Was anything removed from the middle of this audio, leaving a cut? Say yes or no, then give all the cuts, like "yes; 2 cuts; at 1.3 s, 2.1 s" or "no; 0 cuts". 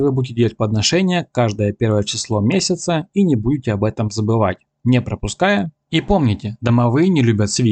yes; 1 cut; at 5.8 s